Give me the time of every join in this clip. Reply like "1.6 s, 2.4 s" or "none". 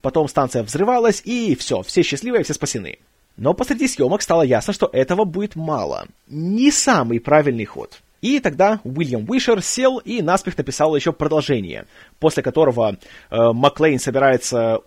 6.2 s, 8.2 s